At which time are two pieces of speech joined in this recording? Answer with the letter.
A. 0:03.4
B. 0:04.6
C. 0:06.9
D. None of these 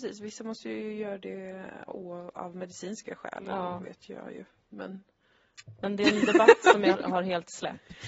C